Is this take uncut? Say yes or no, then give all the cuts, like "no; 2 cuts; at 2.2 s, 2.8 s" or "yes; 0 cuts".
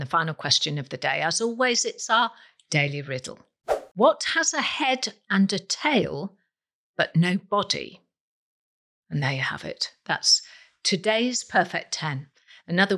yes; 0 cuts